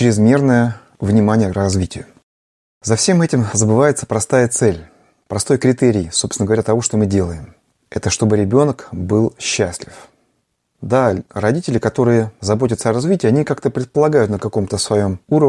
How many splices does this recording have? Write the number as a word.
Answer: zero